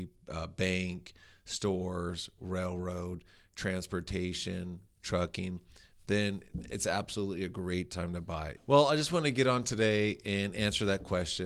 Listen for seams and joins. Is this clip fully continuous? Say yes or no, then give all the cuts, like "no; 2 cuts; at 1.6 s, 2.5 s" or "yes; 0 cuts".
no; 1 cut; at 8.6 s